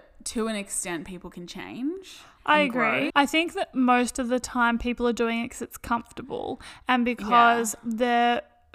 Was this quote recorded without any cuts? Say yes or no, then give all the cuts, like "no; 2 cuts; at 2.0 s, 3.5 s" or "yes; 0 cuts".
no; 1 cut; at 3.1 s